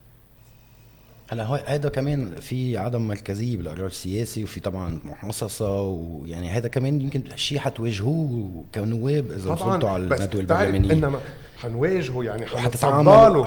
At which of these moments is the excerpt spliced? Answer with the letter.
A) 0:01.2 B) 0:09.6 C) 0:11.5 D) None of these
C